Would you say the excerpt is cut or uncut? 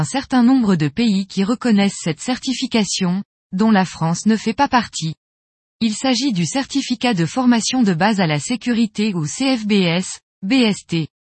cut